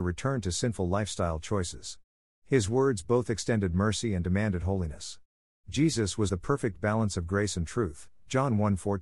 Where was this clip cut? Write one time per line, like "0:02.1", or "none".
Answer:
0:06.3